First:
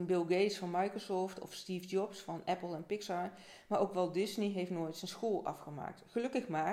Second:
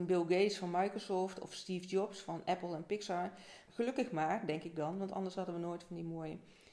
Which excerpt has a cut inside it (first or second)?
second